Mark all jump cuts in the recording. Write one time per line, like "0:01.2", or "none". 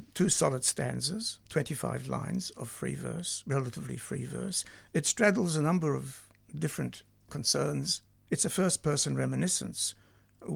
0:08.1